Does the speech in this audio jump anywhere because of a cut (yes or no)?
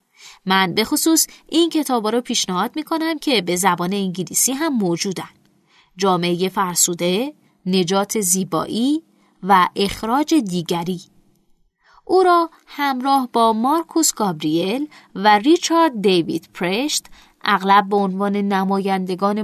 yes